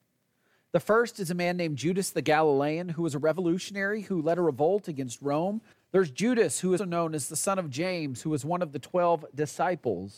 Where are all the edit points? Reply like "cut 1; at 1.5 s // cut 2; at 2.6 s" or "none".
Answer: cut 1; at 5.7 s // cut 2; at 6.8 s